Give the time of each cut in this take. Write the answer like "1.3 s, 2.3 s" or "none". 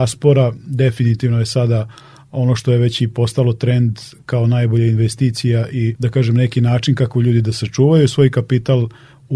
6.0 s